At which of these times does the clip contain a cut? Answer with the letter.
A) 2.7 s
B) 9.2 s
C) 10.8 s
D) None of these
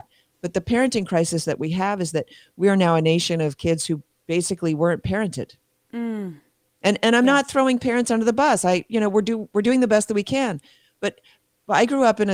D